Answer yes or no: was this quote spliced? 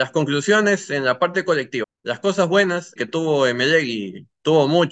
yes